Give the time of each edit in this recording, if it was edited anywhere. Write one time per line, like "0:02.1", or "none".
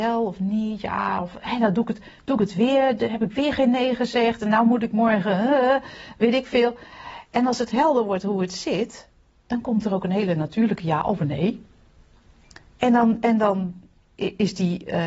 none